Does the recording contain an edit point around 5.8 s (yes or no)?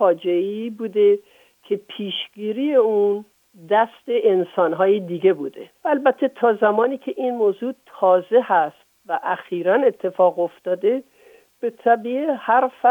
yes